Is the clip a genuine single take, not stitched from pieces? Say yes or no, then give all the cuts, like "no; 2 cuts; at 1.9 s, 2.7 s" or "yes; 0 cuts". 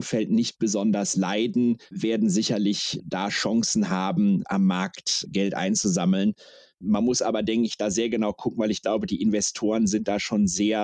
yes; 0 cuts